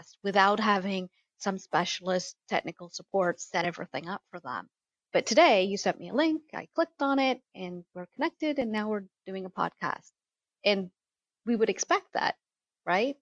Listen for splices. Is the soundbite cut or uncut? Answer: uncut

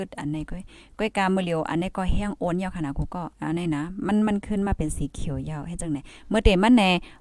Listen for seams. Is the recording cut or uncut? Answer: cut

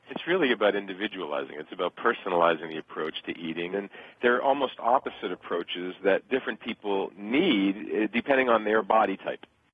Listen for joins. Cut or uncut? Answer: cut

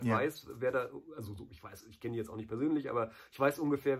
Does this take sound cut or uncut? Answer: uncut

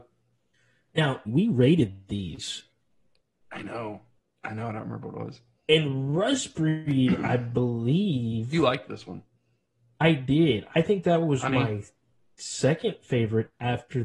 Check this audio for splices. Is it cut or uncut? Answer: cut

